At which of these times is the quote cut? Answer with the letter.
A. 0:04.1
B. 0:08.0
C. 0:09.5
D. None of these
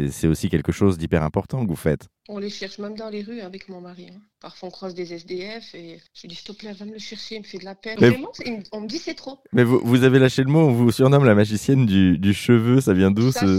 B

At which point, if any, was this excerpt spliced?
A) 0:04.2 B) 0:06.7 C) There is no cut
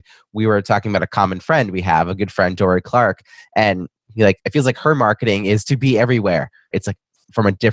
B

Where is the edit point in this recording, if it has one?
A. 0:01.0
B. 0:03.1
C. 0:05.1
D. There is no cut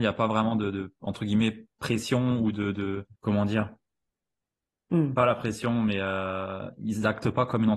B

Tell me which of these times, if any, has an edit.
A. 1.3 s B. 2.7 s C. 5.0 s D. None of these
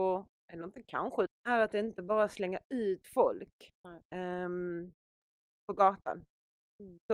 A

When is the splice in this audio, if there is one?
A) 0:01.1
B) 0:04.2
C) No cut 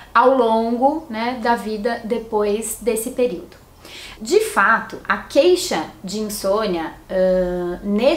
B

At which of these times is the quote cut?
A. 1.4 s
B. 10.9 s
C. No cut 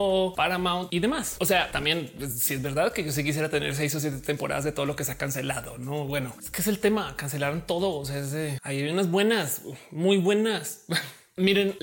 A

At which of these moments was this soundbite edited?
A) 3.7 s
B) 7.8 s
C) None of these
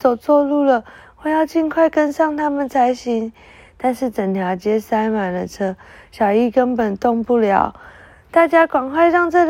C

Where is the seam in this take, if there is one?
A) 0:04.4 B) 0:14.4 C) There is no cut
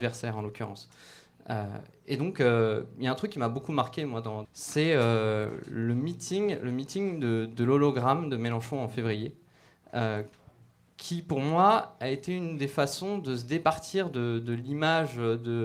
A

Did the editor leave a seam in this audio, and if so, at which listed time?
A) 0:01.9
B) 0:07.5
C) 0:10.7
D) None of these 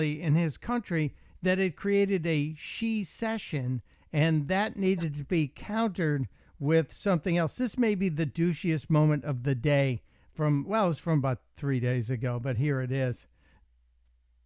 D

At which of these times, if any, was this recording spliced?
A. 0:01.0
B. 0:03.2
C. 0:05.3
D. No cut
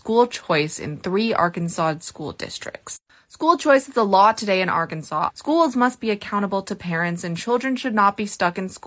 C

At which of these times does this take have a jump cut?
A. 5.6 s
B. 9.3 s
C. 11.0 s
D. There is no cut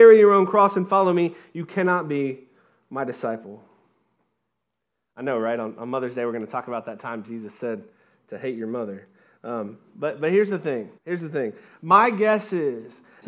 C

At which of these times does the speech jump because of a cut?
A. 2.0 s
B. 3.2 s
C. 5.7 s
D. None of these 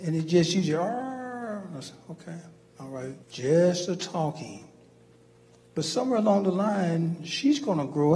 B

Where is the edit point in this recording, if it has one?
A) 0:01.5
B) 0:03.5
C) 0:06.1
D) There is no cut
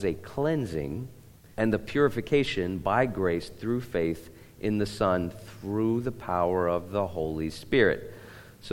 A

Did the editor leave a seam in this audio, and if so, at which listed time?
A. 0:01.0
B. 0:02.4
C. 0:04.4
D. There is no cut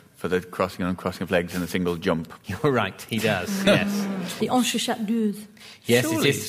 C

